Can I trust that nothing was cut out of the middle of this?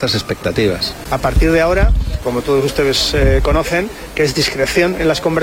no; 2 cuts; at 1.0 s, 2.2 s

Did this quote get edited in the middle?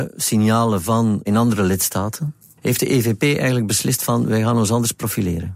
yes; 1 cut; at 2.6 s

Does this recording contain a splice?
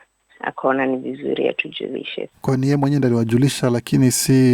yes; 1 cut; at 2.3 s

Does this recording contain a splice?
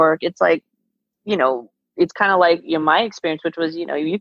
no; 0 cuts

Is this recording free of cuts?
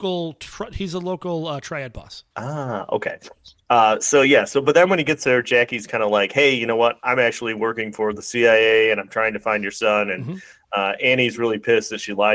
no; 1 cut; at 2.3 s

